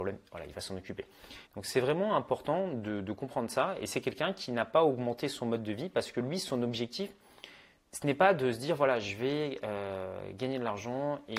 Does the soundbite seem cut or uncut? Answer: cut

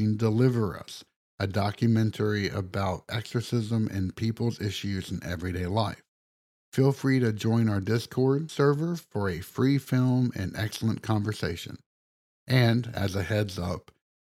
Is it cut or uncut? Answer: uncut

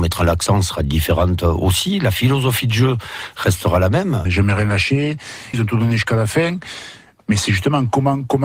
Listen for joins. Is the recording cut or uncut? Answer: cut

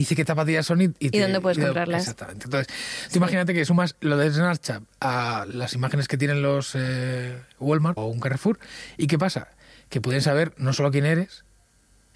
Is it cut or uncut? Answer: cut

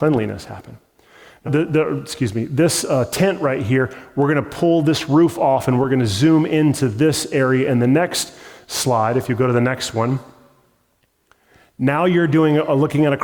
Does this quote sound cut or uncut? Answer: cut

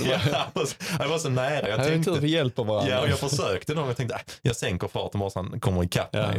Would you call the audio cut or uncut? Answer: uncut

